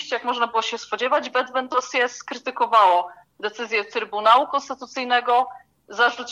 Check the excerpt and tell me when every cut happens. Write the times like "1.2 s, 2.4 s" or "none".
none